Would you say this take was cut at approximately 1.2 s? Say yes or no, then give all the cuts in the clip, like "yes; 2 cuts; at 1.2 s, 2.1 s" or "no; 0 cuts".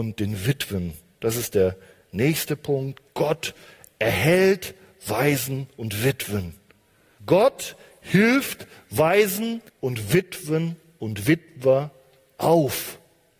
no; 2 cuts; at 7.2 s, 9.7 s